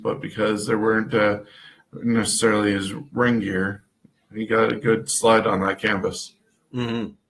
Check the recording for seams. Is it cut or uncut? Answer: uncut